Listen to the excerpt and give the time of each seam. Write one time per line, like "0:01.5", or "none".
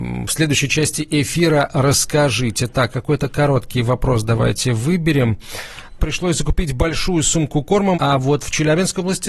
0:06.0
0:07.9